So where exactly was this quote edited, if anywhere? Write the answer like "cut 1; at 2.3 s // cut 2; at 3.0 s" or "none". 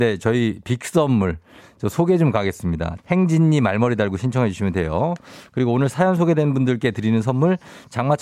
cut 1; at 3.0 s